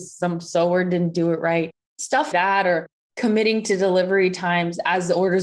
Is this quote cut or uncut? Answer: cut